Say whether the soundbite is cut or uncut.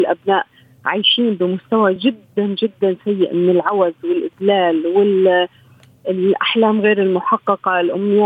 uncut